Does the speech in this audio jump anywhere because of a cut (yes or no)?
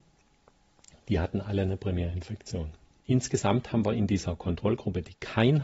no